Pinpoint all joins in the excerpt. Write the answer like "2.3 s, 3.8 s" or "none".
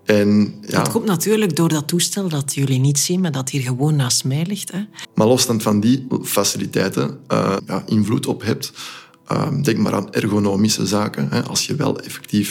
5.0 s, 7.6 s